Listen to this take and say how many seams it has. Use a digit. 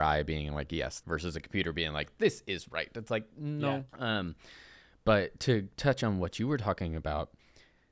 2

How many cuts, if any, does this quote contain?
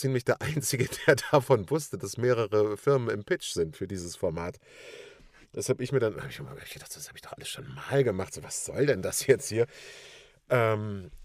0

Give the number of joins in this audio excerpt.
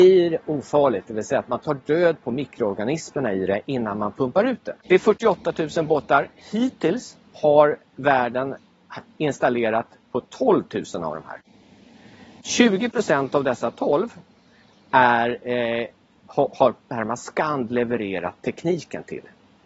0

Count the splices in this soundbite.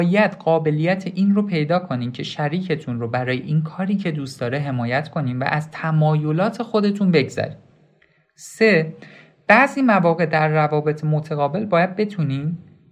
0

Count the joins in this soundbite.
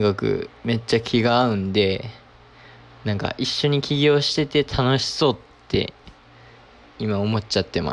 0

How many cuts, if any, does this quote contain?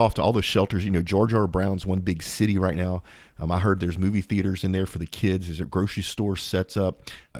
0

